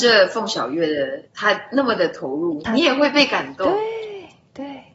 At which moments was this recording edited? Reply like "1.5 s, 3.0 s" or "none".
1.3 s